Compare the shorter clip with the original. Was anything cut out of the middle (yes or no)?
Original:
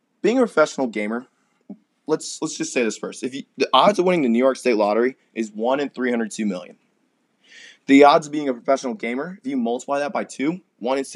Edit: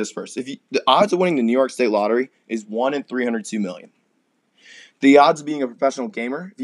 no